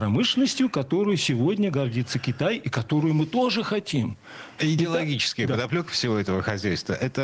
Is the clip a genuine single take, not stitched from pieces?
no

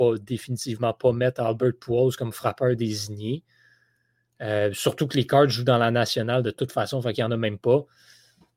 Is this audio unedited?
yes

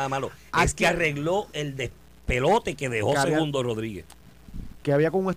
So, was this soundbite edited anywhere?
no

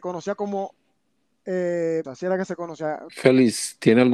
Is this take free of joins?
no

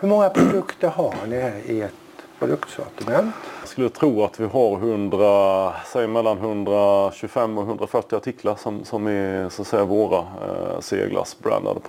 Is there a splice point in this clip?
no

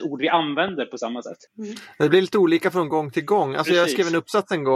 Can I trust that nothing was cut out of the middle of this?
no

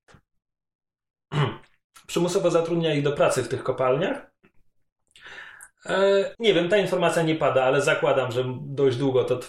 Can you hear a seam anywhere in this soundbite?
yes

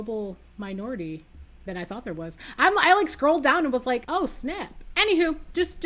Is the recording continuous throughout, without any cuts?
yes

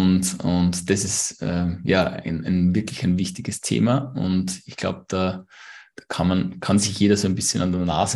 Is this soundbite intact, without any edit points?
yes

